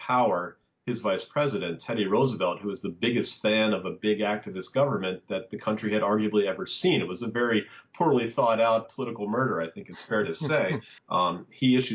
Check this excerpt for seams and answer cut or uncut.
cut